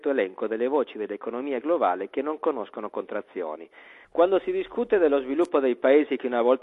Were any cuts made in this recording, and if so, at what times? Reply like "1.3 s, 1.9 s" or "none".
4.0 s